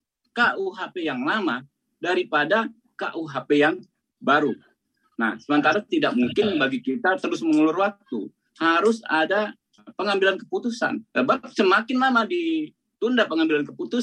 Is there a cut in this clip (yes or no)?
yes